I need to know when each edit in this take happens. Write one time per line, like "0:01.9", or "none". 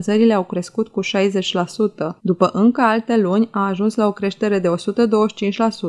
0:02.2